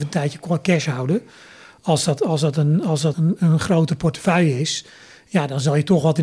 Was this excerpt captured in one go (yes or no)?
no